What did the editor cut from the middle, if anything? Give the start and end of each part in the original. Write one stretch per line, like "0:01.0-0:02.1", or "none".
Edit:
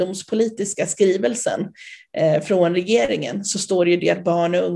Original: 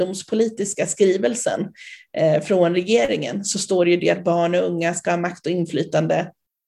none